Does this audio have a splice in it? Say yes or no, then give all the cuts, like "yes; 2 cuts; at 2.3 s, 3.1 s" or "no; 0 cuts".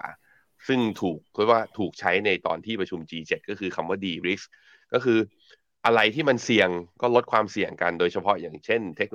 no; 0 cuts